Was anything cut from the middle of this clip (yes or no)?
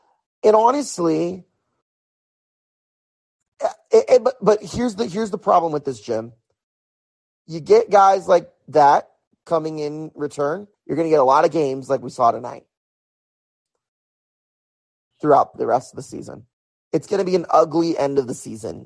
yes